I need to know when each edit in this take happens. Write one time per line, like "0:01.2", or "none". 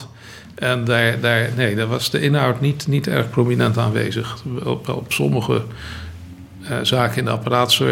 none